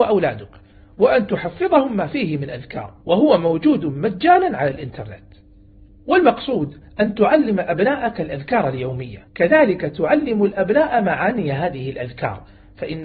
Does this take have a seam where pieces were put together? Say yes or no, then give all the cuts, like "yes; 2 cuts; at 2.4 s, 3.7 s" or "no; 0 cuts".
yes; 2 cuts; at 3.0 s, 9.3 s